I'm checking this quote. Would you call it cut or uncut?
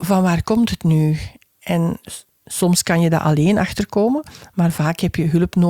uncut